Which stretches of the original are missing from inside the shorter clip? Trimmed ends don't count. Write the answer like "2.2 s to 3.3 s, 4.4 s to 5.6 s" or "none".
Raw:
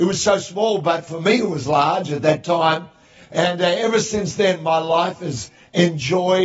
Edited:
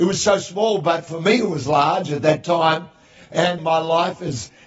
3.6 s to 4.6 s